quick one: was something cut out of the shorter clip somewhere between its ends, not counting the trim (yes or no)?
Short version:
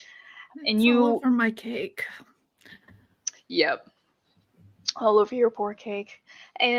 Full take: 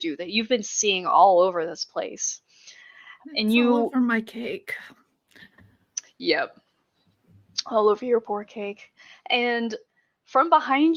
no